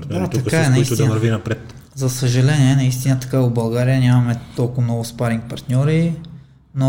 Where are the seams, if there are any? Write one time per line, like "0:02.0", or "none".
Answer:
none